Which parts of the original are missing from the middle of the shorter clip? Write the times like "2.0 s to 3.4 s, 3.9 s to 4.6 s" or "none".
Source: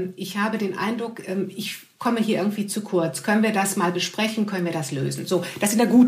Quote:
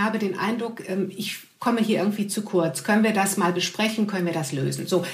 none